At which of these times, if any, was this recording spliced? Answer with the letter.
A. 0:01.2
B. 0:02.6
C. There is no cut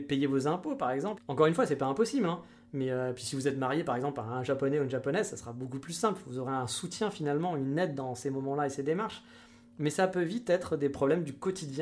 A